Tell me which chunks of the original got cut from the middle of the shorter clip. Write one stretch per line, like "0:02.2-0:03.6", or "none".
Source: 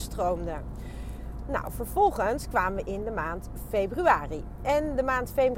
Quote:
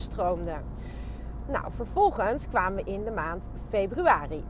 none